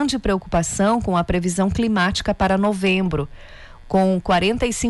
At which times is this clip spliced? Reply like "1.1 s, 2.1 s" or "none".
3.8 s

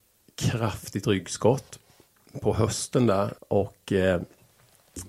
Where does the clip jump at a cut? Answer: 3.4 s

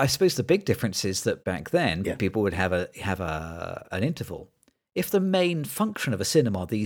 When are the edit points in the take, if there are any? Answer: 1.4 s, 3.9 s

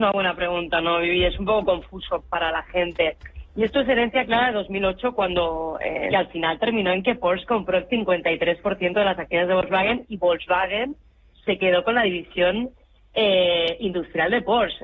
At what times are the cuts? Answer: 2.2 s, 6.1 s

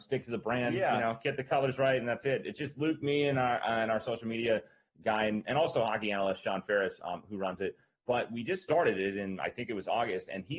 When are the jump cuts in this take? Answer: none

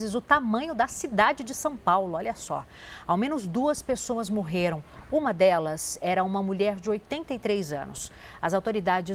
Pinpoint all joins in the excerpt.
none

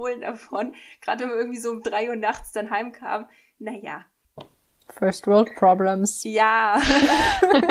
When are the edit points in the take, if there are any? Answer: none

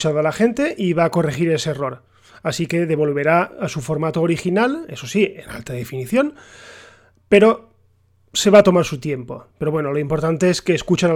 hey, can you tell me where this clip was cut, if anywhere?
9.5 s

